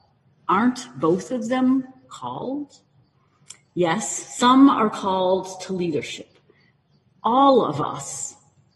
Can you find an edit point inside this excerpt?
no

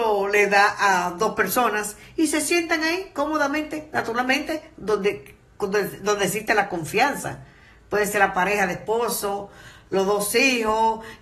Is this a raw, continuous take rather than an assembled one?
yes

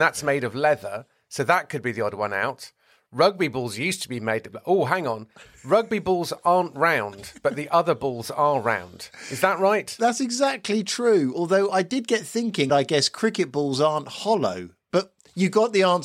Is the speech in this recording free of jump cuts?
no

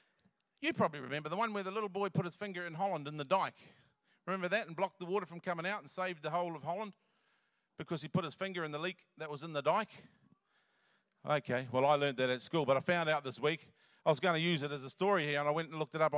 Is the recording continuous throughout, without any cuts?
yes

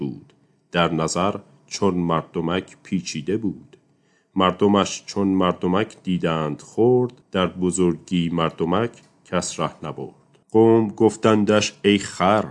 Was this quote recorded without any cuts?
no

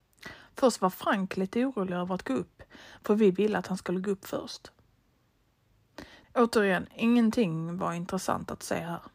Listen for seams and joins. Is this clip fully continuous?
no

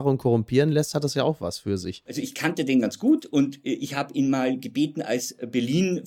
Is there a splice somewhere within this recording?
no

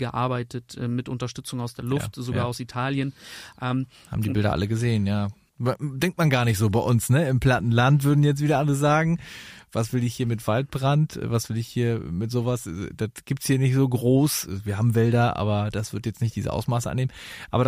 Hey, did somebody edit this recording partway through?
no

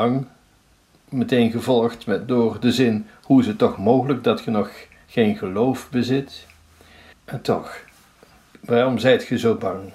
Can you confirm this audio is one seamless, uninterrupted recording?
no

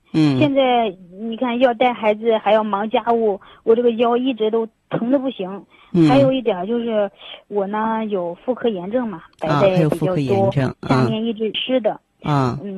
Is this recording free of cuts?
no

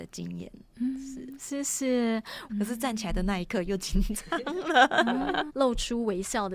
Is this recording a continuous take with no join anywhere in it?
no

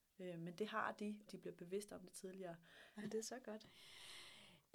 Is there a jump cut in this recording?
yes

